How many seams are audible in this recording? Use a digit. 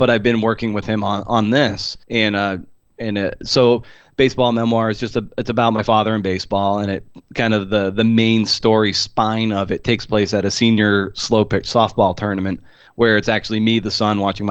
1